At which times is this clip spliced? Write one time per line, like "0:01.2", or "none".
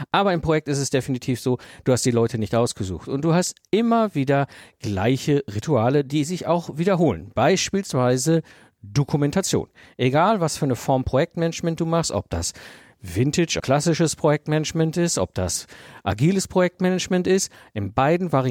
0:13.6